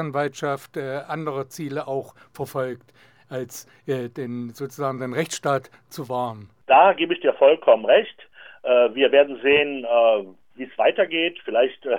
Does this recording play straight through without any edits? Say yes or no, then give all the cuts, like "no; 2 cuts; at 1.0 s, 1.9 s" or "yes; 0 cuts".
yes; 0 cuts